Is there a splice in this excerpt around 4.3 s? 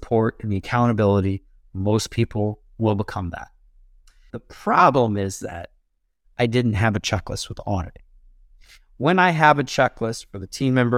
yes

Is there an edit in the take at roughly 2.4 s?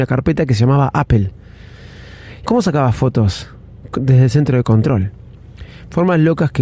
yes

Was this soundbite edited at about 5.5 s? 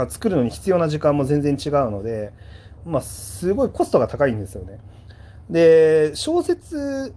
no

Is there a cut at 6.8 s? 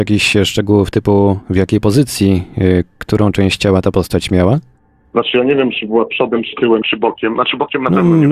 yes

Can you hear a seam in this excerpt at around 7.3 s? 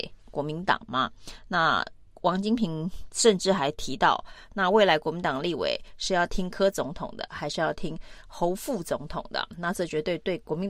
yes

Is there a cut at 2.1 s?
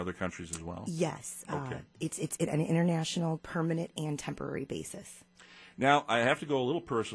no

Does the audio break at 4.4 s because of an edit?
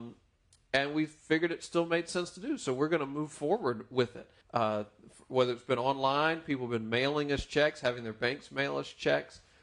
yes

